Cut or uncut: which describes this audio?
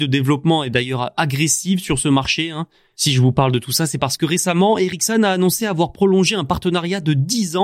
uncut